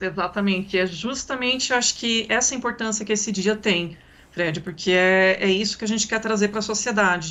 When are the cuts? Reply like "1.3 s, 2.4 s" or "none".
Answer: none